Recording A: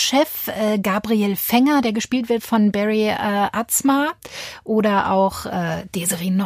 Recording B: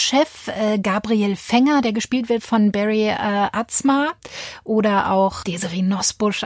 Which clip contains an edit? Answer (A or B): B